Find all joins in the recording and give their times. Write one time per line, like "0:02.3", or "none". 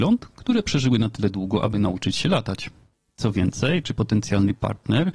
0:03.8